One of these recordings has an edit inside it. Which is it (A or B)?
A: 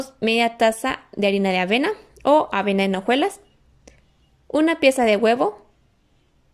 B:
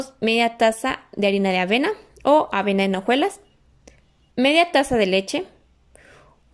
B